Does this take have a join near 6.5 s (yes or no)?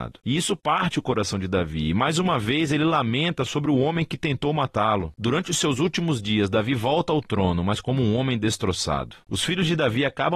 no